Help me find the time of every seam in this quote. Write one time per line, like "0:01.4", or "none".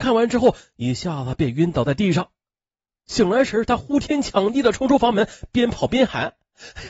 none